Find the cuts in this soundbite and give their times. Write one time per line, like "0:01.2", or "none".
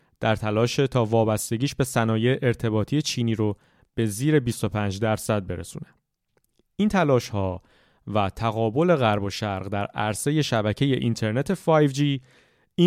none

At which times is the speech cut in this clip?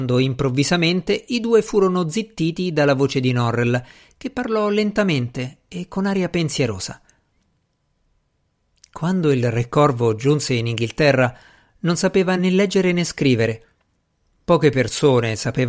none

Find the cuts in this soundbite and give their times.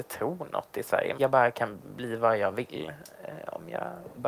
0:01.2

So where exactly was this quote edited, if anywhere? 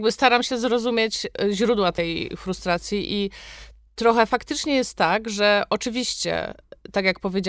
none

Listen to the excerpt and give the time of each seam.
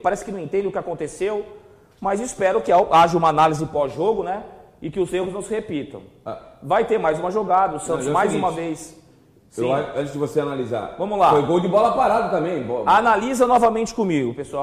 none

